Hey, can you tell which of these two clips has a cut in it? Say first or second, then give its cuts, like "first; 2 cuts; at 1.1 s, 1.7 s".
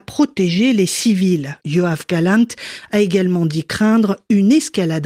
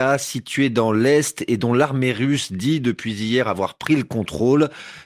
first; 1 cut; at 1.6 s